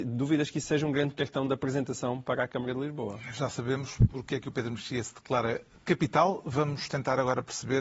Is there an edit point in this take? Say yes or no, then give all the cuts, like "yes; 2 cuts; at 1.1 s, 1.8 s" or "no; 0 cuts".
no; 0 cuts